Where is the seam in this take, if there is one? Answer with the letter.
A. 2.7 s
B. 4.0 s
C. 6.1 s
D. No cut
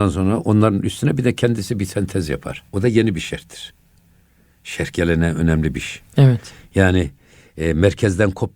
A